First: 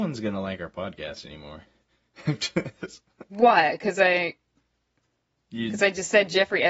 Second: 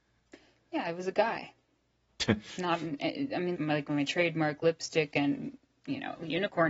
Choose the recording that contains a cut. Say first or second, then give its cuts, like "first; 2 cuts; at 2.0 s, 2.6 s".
second; 1 cut; at 3.6 s